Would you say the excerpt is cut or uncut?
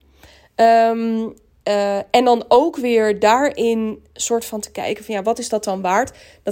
uncut